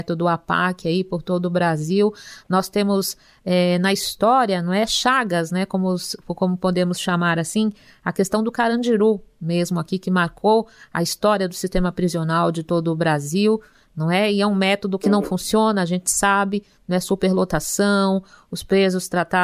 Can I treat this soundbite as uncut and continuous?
yes; 0 cuts

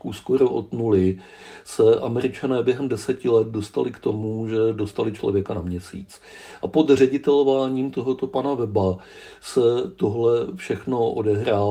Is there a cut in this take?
no; 0 cuts

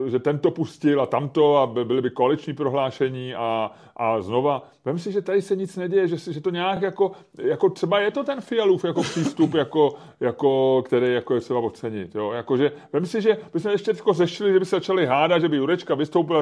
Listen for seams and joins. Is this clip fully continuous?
yes; 0 cuts

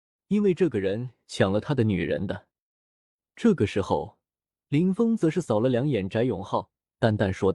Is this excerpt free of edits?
yes; 0 cuts

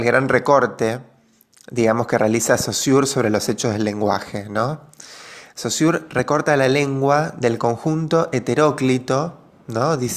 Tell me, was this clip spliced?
no; 0 cuts

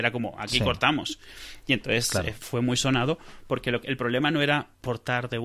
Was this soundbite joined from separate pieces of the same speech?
no; 0 cuts

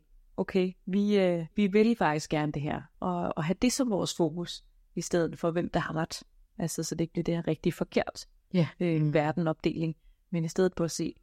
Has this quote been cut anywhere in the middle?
yes; 2 cuts; at 1.5 s, 2.9 s

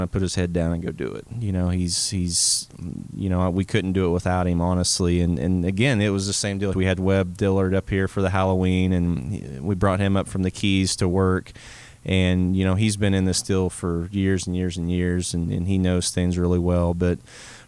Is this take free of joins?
no; 1 cut; at 6.7 s

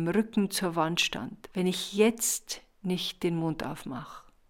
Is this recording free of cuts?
no; 1 cut; at 1.5 s

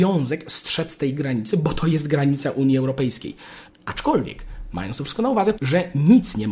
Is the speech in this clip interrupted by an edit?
yes; 2 cuts; at 3.7 s, 5.5 s

